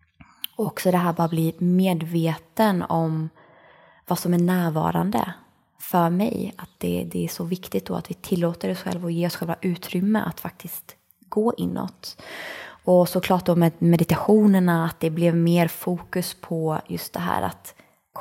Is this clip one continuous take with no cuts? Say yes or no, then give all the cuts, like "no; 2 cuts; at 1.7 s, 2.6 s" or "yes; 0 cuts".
yes; 0 cuts